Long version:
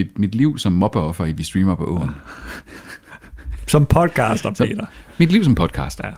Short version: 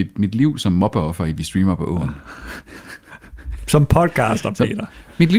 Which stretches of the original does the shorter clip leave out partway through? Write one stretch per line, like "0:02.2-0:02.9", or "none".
none